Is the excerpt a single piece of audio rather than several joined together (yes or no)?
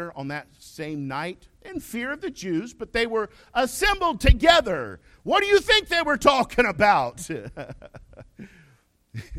yes